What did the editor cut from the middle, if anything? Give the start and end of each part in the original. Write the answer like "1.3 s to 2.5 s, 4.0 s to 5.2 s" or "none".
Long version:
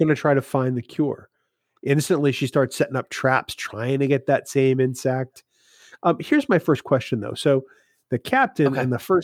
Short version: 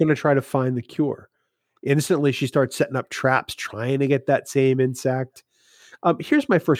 none